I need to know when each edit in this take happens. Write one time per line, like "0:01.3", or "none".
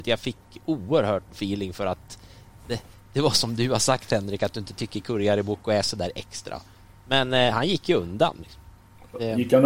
none